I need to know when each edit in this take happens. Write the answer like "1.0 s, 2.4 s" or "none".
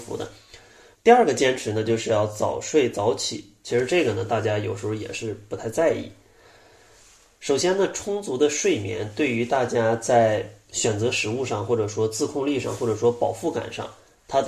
0.9 s

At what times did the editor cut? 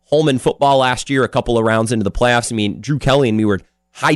none

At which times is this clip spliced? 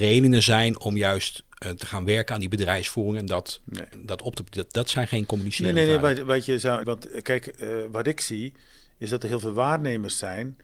6.8 s

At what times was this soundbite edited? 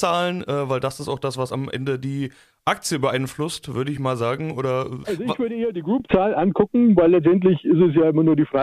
none

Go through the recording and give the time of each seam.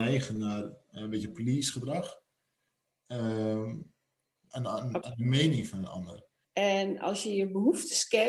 4.4 s, 6.4 s

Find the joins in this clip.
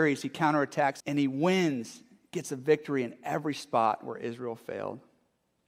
1.0 s

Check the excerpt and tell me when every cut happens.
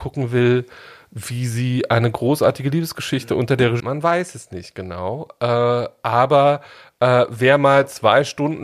3.8 s

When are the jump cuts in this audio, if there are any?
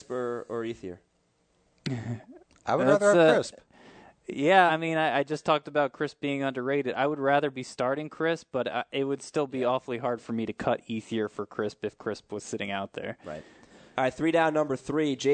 4.7 s

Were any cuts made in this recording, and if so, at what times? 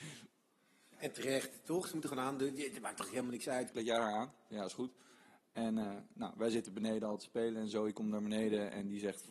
3.7 s

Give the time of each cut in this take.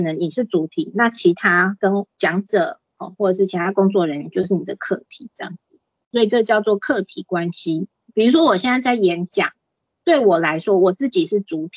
8.1 s

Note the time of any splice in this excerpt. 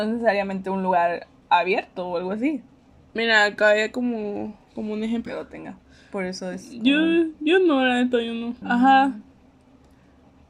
5.3 s, 8.6 s

